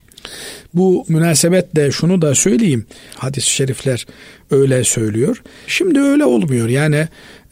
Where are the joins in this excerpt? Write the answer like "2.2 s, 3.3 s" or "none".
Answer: 3.1 s, 5.7 s

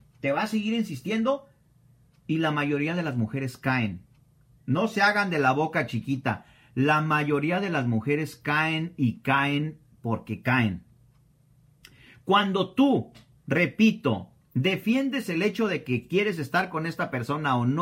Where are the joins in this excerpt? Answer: none

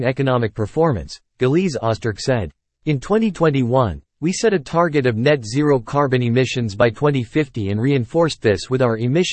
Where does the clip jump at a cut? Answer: 2.7 s

